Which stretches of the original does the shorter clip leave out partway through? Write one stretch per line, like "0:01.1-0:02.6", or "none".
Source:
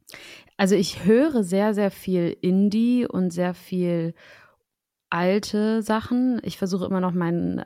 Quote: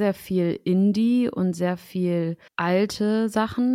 0:04.2-0:05.0